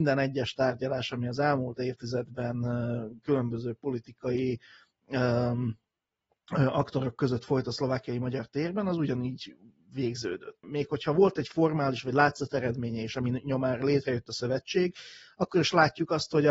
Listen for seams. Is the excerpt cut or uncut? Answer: cut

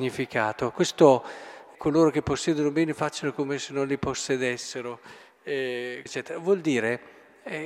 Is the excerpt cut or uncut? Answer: cut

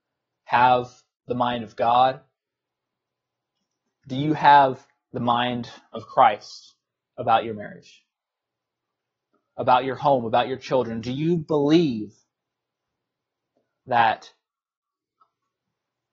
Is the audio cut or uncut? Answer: uncut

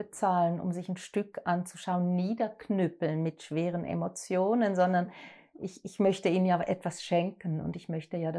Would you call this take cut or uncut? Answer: uncut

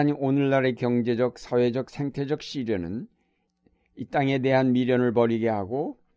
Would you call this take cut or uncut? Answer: uncut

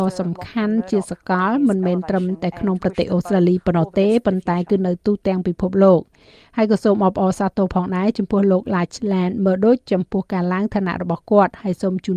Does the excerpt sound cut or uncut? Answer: uncut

